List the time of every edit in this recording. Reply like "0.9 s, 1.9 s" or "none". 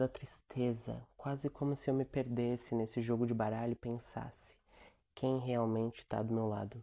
none